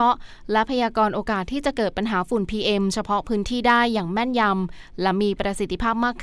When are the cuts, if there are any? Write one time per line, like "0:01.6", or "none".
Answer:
none

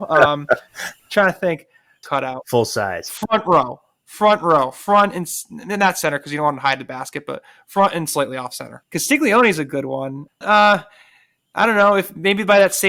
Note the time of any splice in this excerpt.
0:02.0
0:08.8
0:10.4

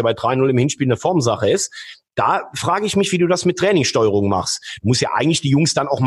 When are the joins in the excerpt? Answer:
none

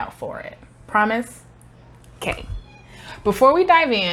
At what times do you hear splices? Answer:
none

